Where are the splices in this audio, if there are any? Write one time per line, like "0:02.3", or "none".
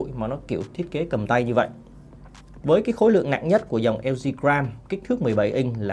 0:02.6